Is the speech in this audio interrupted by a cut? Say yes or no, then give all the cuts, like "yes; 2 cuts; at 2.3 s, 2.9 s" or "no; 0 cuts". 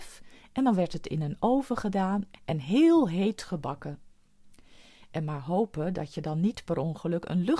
no; 0 cuts